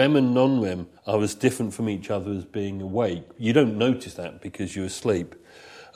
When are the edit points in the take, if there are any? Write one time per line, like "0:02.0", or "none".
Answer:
0:01.0